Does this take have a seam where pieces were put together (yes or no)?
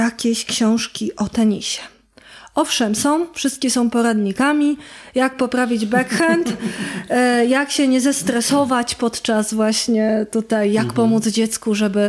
no